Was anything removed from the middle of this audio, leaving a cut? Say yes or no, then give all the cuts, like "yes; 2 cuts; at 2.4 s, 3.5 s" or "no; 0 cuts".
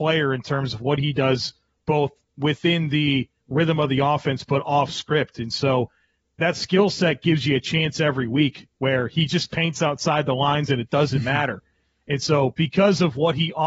no; 0 cuts